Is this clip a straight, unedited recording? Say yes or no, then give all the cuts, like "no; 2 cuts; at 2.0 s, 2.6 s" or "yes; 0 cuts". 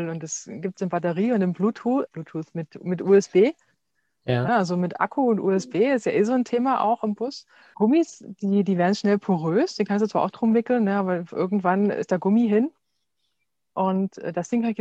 no; 3 cuts; at 2.1 s, 4.5 s, 7.7 s